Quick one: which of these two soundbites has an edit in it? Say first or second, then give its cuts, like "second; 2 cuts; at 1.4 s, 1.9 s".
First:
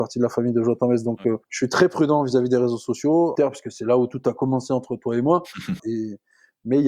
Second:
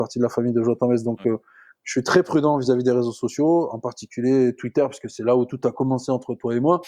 first; 3 cuts; at 1.4 s, 3.4 s, 5.8 s